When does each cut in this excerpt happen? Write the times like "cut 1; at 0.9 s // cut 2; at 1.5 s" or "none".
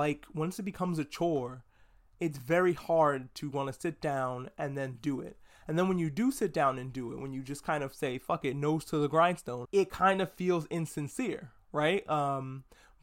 cut 1; at 9.7 s